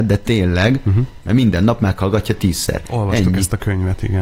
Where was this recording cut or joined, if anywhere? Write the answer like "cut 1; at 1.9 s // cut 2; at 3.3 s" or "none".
cut 1; at 1.2 s